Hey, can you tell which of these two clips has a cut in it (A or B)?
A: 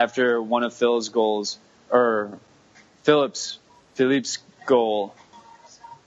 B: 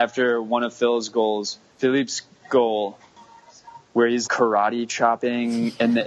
B